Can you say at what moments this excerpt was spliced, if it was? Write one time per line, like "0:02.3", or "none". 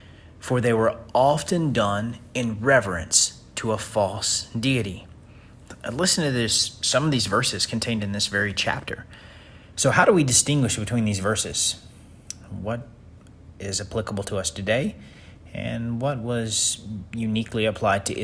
0:09.7